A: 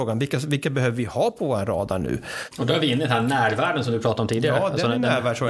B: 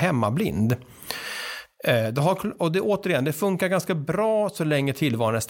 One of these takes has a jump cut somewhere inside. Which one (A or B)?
A